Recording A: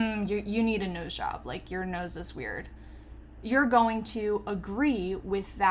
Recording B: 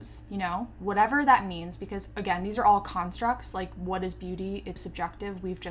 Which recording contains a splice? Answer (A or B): B